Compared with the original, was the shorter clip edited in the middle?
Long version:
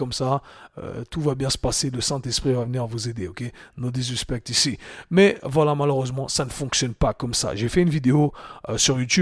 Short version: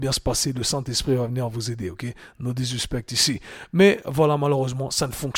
no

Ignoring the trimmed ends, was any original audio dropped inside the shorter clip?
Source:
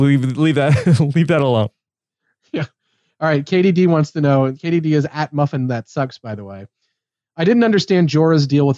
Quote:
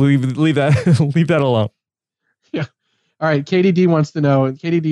no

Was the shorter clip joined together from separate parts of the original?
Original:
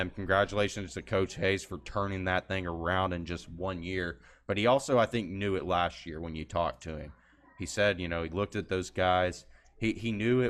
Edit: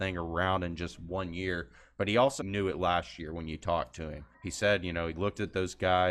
yes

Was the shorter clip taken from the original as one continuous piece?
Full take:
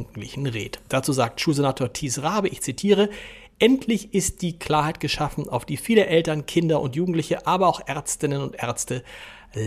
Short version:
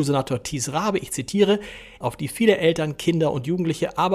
no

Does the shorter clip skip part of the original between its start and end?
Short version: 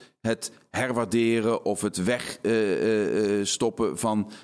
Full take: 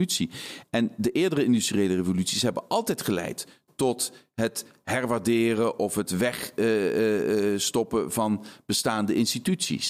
no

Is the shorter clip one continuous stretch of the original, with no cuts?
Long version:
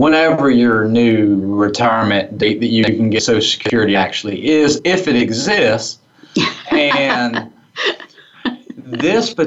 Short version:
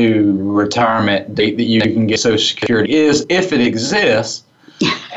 no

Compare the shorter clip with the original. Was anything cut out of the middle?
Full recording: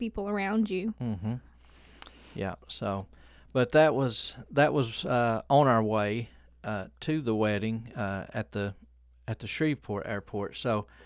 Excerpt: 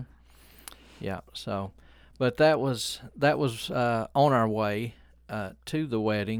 no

